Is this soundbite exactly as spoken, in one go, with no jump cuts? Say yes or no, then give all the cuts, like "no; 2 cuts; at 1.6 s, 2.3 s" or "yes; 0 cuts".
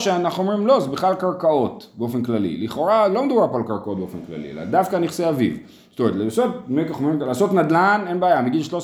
yes; 0 cuts